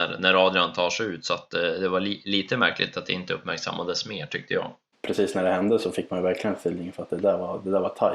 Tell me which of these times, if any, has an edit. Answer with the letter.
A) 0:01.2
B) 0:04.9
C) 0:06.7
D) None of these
B